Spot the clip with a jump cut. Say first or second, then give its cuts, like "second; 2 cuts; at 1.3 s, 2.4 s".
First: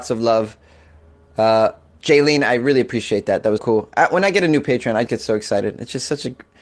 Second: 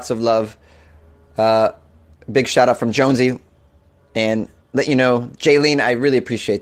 first; 3 cuts; at 2.0 s, 3.6 s, 5.1 s